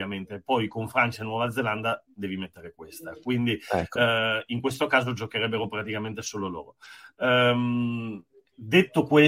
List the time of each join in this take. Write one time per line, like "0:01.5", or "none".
none